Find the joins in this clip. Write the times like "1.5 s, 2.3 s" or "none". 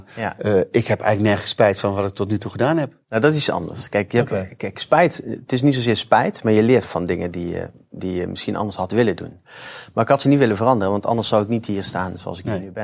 3.0 s, 6.8 s